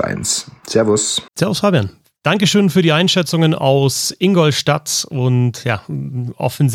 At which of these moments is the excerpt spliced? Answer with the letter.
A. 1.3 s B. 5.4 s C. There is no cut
A